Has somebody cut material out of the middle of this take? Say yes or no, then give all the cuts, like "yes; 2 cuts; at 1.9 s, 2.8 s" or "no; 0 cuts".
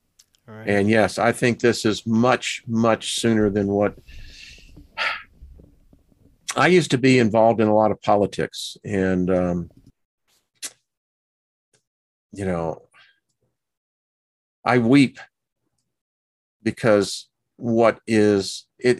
no; 0 cuts